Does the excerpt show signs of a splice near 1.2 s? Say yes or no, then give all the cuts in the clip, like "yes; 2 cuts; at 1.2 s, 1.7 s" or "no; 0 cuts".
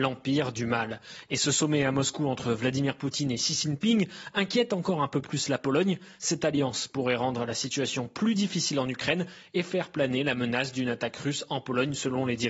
no; 0 cuts